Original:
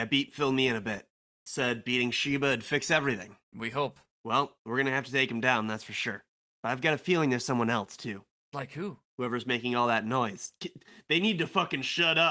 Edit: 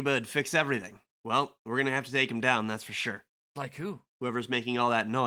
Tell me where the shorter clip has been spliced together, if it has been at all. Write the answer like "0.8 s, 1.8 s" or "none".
1.1 s, 3.5 s